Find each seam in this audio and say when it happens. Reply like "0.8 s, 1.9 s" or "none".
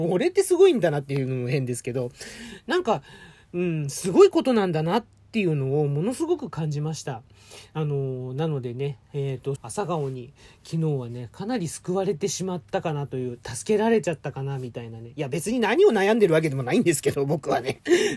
9.6 s